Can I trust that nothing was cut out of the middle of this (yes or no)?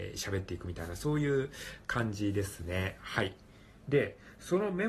yes